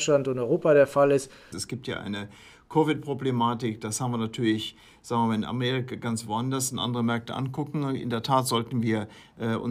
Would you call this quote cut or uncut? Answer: cut